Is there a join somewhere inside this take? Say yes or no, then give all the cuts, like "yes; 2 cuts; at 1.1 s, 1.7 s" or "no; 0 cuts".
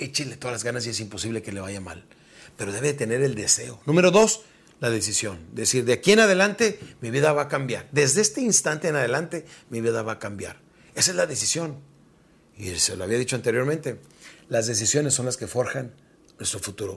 no; 0 cuts